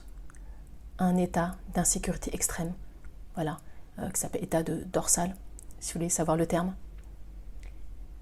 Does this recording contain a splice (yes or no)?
no